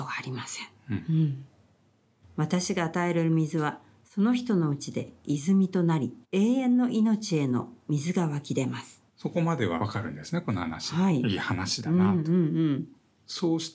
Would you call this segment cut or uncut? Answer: cut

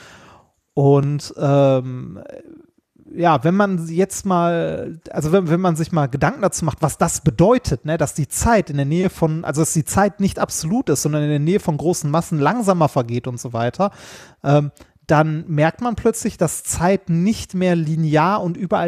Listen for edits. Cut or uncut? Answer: uncut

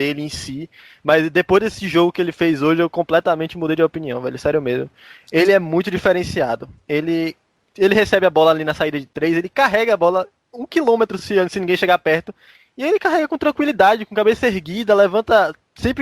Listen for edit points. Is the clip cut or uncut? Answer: uncut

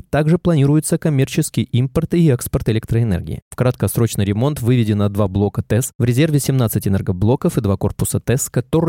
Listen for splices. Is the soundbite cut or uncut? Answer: uncut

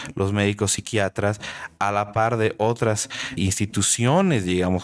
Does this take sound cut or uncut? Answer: cut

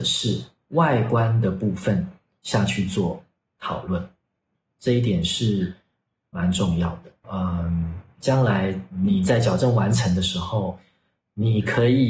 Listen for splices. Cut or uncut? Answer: cut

